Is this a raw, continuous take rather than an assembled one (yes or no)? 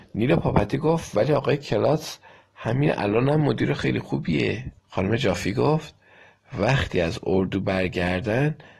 no